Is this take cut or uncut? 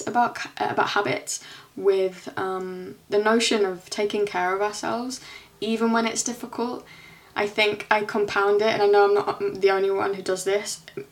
cut